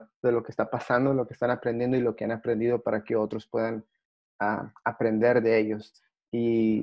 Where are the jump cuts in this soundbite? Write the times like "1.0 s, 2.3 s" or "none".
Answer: none